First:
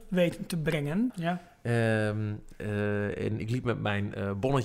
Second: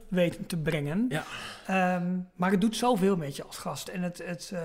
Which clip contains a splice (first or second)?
first